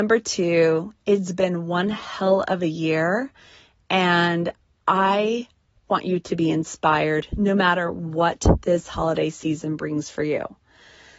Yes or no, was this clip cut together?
no